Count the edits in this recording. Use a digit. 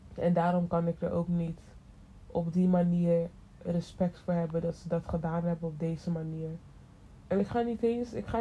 1